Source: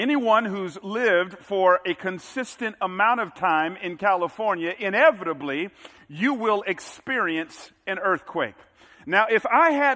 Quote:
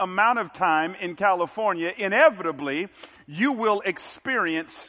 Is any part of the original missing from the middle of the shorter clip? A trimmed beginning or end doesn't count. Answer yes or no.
no